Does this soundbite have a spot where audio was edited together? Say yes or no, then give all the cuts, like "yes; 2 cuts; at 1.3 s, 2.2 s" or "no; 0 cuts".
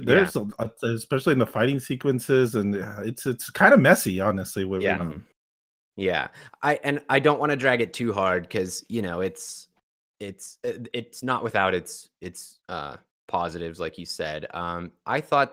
yes; 2 cuts; at 5.0 s, 12.6 s